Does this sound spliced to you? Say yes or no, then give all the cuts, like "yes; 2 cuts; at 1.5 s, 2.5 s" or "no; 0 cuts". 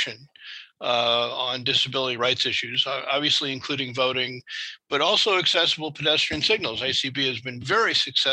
no; 0 cuts